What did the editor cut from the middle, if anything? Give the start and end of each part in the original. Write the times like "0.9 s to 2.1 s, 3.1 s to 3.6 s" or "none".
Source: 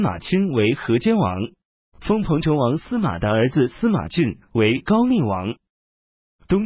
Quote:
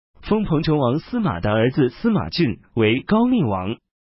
none